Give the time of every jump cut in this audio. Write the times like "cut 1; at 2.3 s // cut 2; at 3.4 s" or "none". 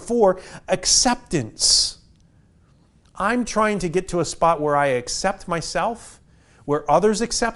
none